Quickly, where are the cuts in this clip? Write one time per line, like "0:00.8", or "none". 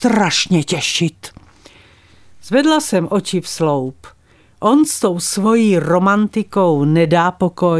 none